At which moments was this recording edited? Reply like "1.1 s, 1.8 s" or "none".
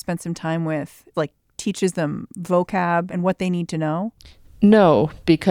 1.1 s, 3.1 s

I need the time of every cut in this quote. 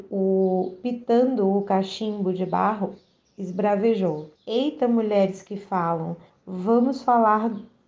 4.3 s, 6.3 s

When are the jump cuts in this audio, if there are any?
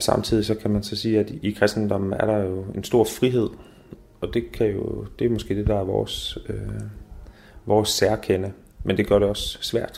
none

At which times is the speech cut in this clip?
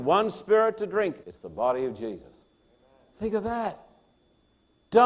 1.2 s

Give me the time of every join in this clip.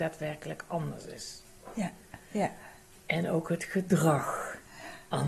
none

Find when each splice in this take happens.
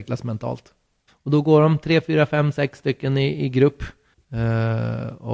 1.1 s, 4.1 s

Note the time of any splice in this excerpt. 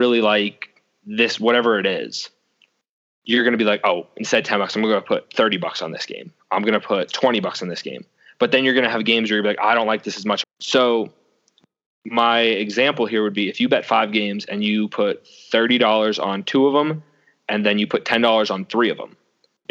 10.4 s

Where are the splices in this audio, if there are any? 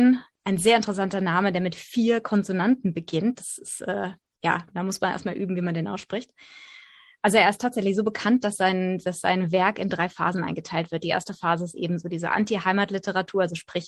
none

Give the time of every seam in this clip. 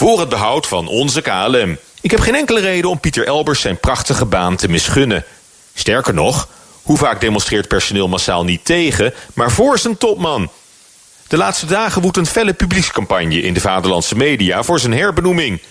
1.9 s, 11.1 s

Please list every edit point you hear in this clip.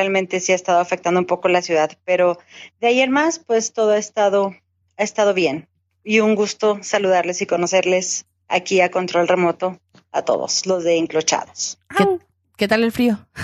none

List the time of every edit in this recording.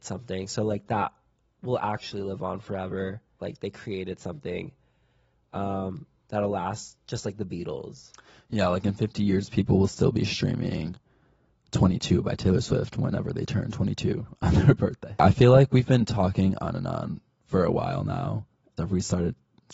3.4 s, 18.8 s

